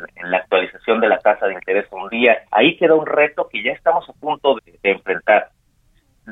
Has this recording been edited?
yes; 2 cuts; at 2.5 s, 4.6 s

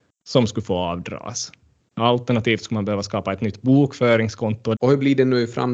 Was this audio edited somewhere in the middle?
yes; 2 cuts; at 1.9 s, 4.7 s

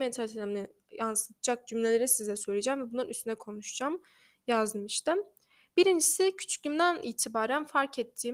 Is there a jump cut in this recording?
no; 0 cuts

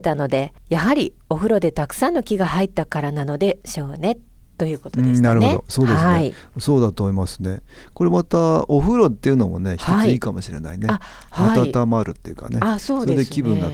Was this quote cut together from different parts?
no; 0 cuts

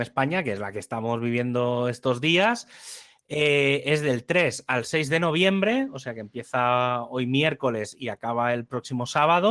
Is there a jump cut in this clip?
no; 0 cuts

